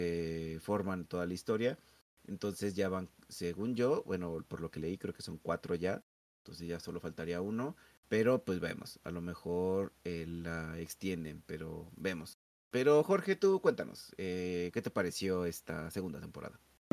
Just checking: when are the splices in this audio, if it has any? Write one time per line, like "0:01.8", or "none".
none